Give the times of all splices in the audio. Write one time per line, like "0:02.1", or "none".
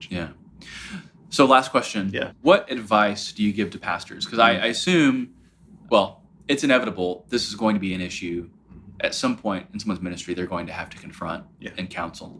none